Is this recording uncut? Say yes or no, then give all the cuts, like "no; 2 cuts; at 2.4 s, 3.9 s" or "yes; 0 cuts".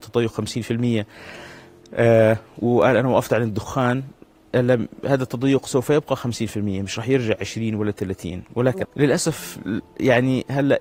no; 1 cut; at 8.8 s